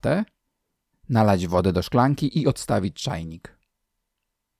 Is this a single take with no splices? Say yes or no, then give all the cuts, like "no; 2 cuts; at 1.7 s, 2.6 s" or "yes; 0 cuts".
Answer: no; 1 cut; at 0.9 s